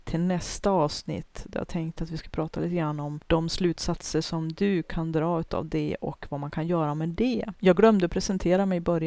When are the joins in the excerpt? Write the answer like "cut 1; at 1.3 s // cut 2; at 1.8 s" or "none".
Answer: cut 1; at 7.5 s

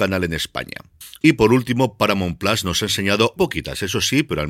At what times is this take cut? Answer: cut 1; at 1.2 s // cut 2; at 3.4 s

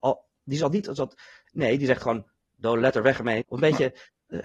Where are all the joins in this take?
cut 1; at 1.4 s // cut 2; at 3.4 s

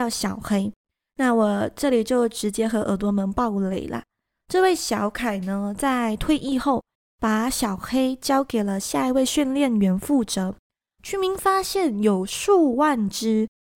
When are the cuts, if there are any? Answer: cut 1; at 11.0 s

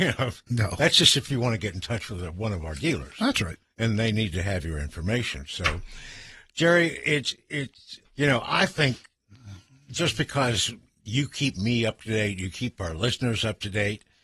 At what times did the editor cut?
cut 1; at 8.1 s

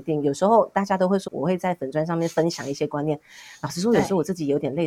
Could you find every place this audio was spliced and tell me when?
cut 1; at 1.3 s

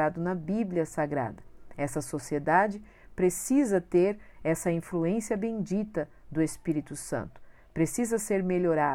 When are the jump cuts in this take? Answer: none

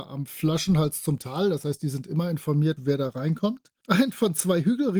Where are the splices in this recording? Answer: cut 1; at 2.8 s

